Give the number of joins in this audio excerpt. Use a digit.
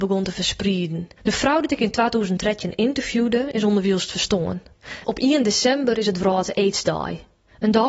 2